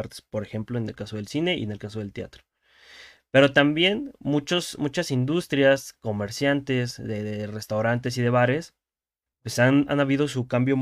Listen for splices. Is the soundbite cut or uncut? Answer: cut